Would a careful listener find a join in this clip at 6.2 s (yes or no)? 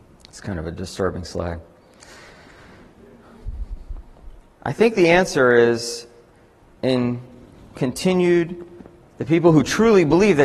no